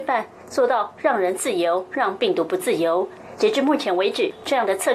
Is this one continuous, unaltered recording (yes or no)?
yes